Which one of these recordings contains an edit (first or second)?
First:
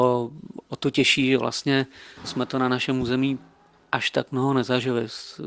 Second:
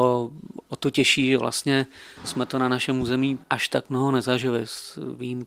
second